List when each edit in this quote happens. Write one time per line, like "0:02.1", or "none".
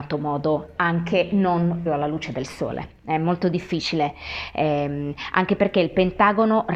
0:01.9